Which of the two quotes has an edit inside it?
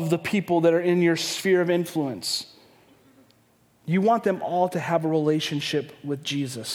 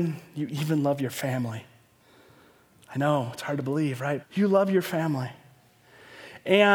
second; 1 cut; at 4.2 s

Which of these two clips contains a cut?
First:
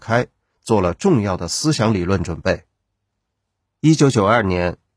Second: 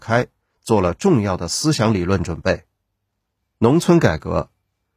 second; 1 cut; at 3.4 s

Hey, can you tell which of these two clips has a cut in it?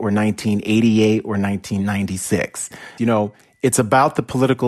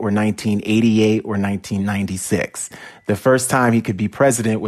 first; 1 cut; at 3.0 s

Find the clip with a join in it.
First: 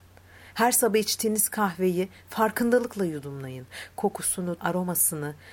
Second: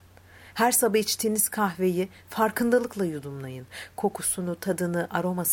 first; 1 cut; at 4.6 s

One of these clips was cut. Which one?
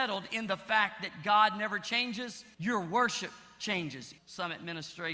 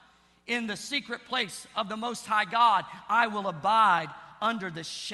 first; 2 cuts; at 2.5 s, 4.2 s

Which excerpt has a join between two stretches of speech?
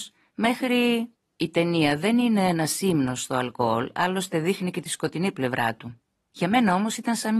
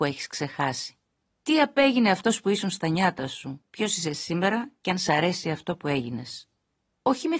first; 1 cut; at 1.1 s

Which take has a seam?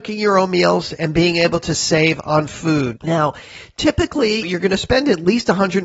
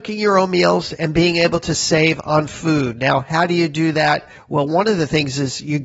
first; 2 cuts; at 2.9 s, 4.4 s

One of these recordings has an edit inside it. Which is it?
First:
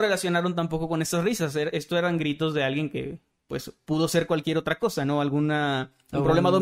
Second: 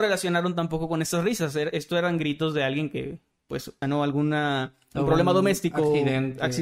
second; 1 cut; at 3.8 s

